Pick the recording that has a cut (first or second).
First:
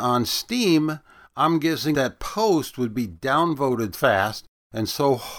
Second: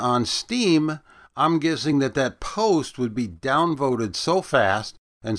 first